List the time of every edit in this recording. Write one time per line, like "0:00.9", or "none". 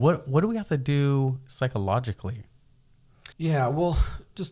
0:03.3

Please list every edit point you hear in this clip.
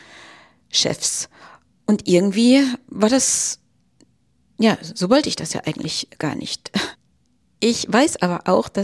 none

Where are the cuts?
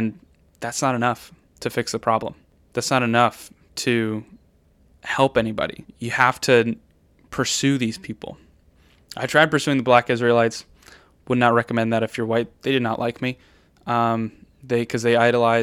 none

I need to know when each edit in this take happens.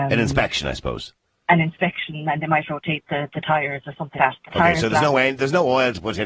0:04.2

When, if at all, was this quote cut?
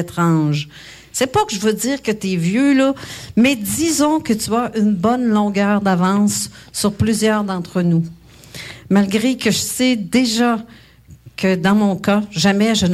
none

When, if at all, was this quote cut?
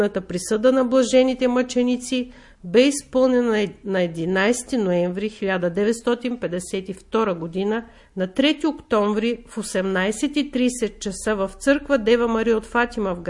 0:08.1

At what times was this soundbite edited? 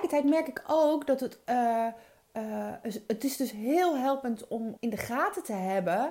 0:04.8

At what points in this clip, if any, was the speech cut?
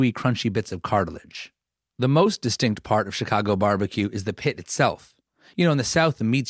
none

